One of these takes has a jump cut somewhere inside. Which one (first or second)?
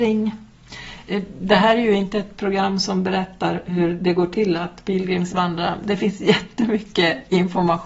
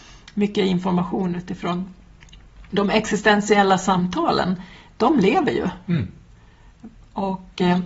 second